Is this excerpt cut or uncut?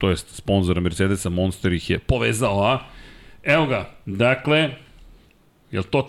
uncut